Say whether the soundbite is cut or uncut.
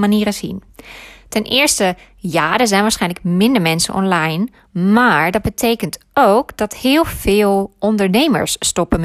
uncut